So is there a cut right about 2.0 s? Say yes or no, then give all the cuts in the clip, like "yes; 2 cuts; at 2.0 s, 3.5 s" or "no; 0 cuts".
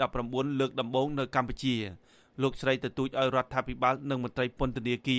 no; 0 cuts